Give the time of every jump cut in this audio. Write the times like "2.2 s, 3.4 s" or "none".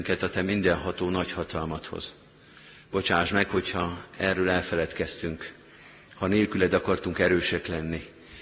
none